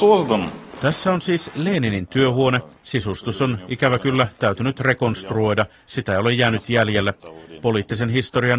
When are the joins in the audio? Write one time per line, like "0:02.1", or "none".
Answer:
0:02.8